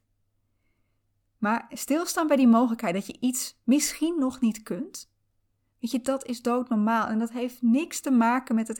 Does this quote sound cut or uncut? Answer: uncut